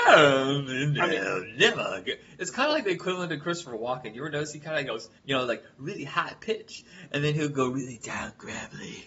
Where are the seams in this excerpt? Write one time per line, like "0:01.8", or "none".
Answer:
0:05.2